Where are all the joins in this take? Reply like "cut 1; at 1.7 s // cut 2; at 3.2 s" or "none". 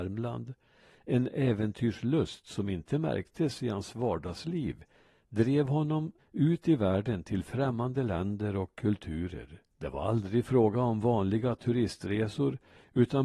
cut 1; at 6.2 s // cut 2; at 9.7 s

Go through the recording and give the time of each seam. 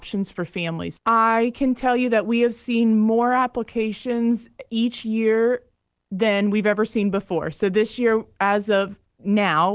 cut 1; at 1.0 s

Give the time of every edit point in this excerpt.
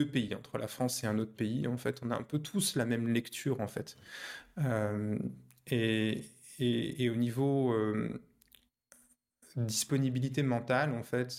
none

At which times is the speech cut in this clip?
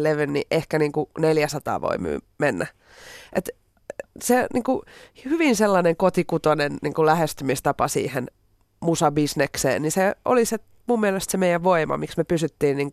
none

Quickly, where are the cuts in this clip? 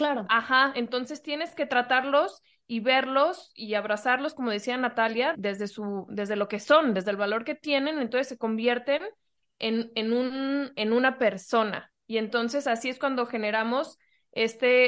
cut 1; at 5.3 s

